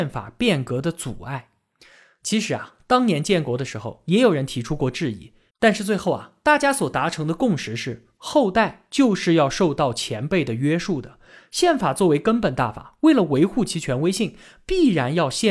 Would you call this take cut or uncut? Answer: cut